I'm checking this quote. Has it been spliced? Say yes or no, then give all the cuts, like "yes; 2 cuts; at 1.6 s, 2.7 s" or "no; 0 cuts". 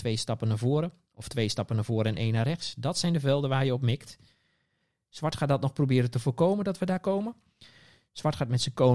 no; 0 cuts